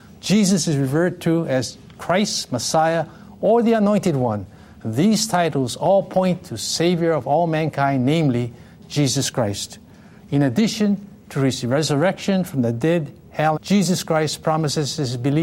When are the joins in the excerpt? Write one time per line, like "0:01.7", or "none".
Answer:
0:10.2
0:13.5